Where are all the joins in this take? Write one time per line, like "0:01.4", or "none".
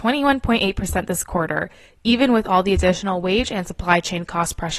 none